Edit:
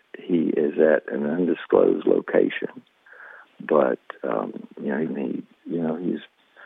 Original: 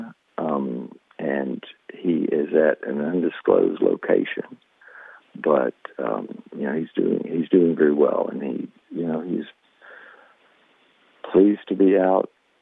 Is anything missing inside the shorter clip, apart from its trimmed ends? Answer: yes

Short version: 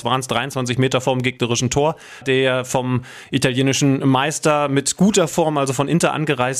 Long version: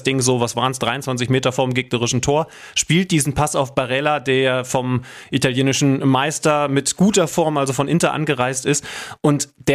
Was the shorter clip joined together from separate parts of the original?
yes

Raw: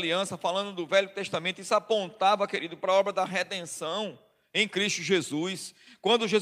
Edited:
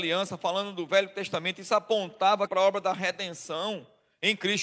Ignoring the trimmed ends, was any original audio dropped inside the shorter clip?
yes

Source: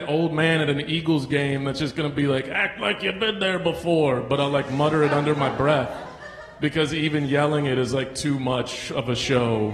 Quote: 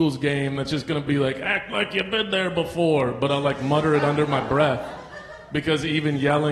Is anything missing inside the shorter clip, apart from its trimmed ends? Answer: no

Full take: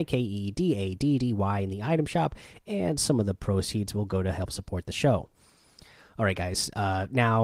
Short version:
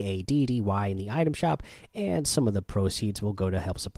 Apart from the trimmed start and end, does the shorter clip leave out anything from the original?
no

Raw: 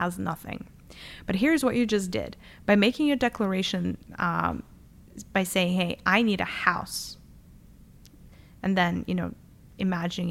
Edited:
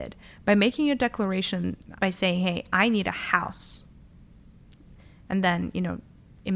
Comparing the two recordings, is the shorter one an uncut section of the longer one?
no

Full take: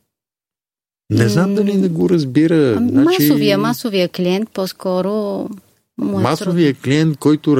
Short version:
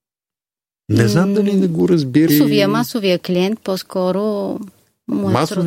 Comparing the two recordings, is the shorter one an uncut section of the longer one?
no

